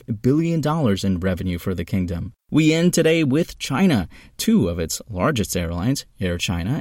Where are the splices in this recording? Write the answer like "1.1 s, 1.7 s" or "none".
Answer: 2.4 s